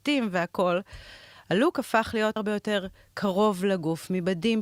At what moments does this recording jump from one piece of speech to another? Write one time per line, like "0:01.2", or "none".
0:02.4